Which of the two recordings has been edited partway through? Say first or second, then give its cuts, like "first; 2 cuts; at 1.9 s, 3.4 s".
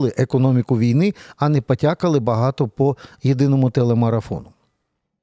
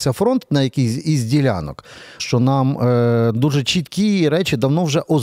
second; 1 cut; at 2.2 s